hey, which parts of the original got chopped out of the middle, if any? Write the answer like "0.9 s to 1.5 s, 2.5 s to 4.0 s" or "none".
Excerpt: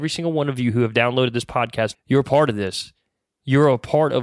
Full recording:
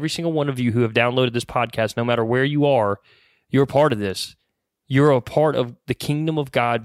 1.9 s to 3.4 s